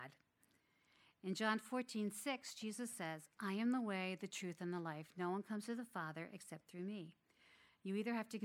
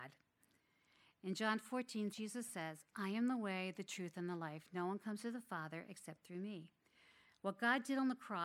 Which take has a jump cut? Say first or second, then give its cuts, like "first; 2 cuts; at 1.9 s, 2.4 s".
second; 2 cuts; at 2.1 s, 7.2 s